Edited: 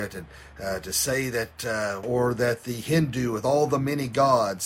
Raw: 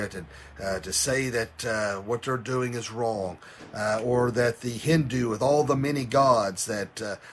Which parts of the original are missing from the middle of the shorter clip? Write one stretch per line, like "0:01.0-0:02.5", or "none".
0:02.0-0:04.0